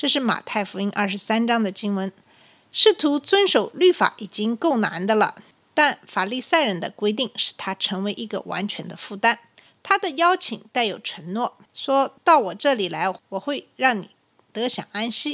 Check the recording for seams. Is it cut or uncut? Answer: uncut